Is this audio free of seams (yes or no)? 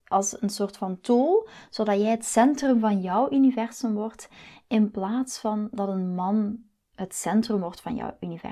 yes